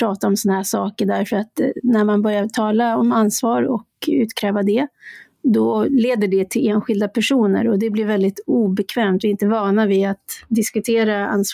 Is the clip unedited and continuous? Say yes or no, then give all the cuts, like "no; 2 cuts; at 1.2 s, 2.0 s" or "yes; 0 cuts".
yes; 0 cuts